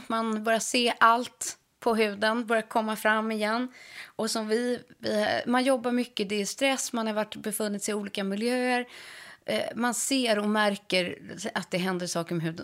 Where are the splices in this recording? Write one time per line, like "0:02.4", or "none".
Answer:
none